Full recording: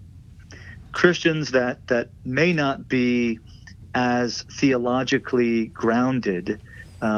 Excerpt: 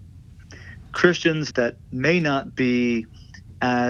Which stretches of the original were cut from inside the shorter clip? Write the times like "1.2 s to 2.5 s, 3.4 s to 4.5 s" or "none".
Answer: 1.5 s to 1.8 s